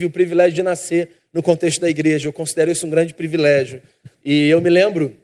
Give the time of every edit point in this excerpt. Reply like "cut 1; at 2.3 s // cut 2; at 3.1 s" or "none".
cut 1; at 4.1 s